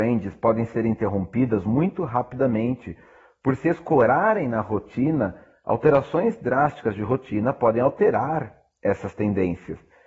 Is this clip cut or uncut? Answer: uncut